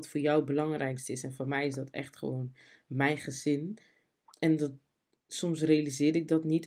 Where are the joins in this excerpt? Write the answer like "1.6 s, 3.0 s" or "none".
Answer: none